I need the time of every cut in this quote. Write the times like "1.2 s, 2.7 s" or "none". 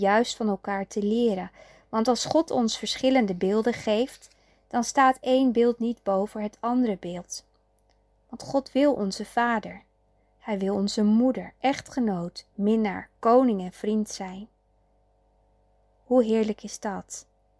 none